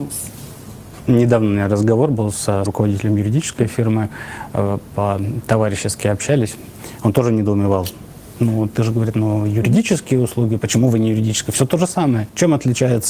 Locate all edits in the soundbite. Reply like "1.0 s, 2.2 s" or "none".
2.7 s, 9.1 s

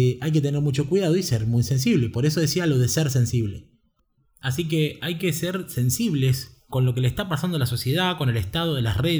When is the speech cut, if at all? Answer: 6.7 s

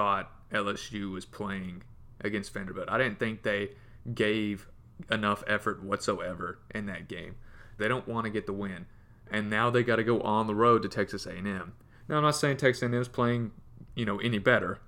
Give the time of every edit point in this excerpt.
7.8 s

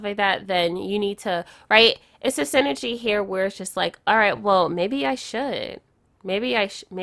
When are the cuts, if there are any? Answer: none

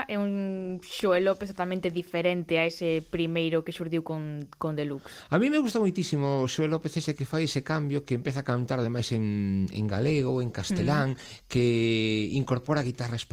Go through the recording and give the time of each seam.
none

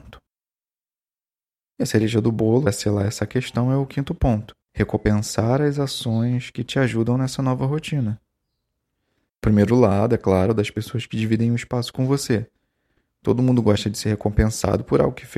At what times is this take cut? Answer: 4.6 s, 9.3 s

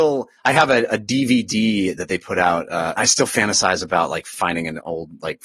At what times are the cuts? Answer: 3.0 s

